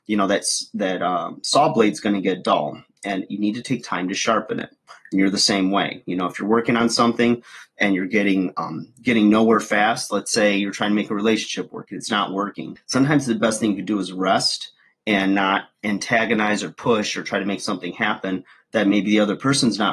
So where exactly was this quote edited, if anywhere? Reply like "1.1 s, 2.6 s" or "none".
12.8 s